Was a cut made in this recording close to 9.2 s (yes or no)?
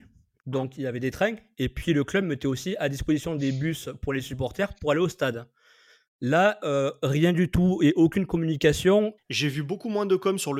yes